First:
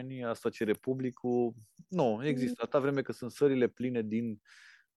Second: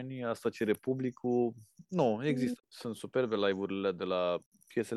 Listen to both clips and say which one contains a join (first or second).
second